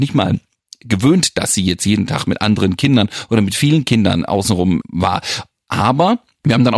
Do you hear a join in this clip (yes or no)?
no